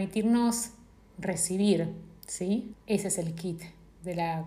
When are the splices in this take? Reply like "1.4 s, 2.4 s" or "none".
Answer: 2.7 s

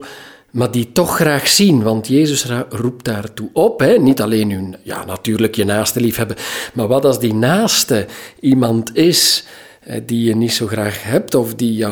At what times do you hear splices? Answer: none

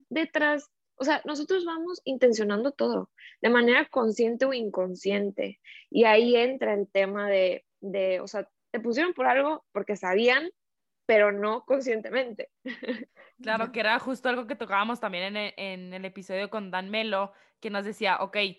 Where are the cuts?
none

